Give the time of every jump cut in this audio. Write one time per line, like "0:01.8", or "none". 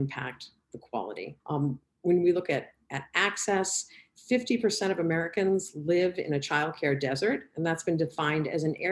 0:01.4